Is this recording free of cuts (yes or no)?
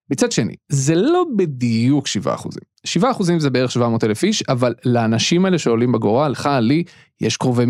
yes